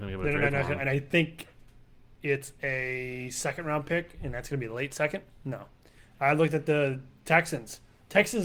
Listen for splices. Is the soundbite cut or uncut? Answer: uncut